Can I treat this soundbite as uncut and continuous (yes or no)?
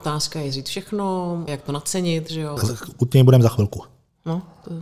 no